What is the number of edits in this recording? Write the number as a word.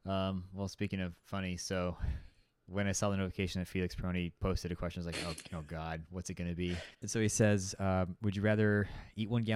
one